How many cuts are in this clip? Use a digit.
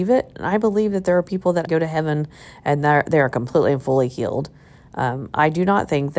1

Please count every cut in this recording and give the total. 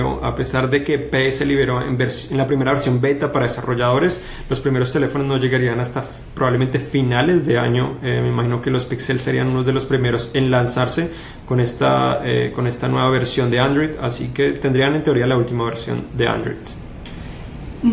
0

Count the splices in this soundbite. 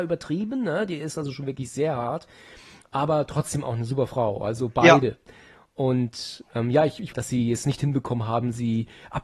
1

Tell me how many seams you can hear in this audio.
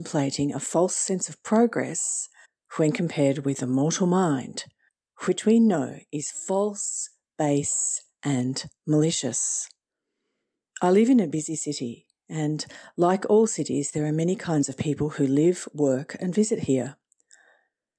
0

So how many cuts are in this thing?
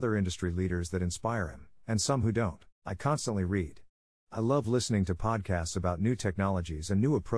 1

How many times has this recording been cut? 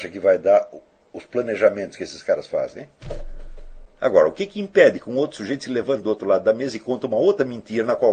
0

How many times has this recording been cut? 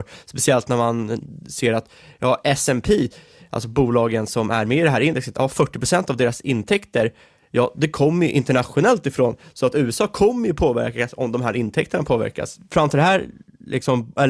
0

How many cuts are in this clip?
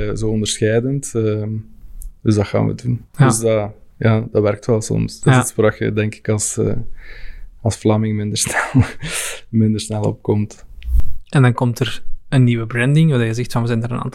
0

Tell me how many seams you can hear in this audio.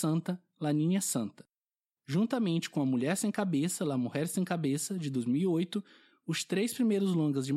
0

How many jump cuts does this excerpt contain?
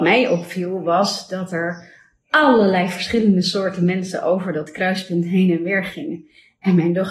0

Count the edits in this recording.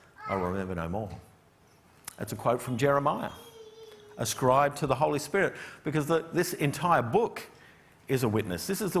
0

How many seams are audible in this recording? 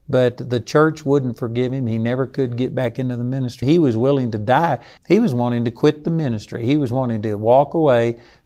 2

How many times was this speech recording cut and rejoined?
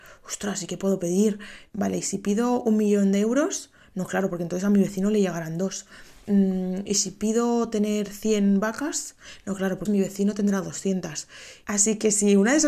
2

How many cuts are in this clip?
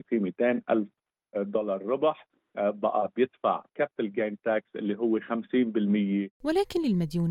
1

